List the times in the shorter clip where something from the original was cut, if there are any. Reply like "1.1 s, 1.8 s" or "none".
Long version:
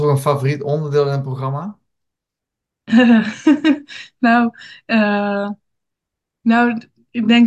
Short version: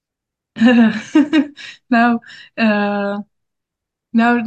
none